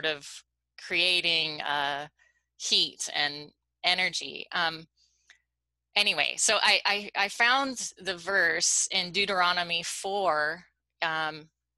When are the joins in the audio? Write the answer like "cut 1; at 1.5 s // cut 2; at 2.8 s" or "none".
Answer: none